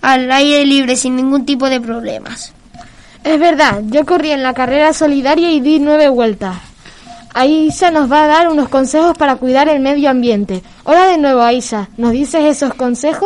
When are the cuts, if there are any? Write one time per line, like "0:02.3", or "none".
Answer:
none